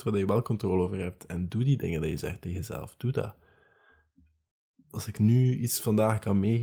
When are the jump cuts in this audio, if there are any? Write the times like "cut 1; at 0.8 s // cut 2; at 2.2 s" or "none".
none